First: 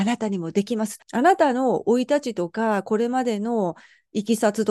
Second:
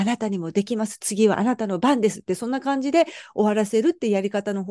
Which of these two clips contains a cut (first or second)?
first